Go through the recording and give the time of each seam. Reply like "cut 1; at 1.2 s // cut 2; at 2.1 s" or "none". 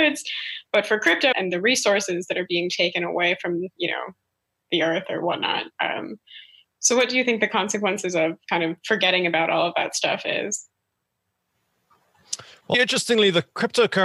cut 1; at 1.3 s // cut 2; at 12.7 s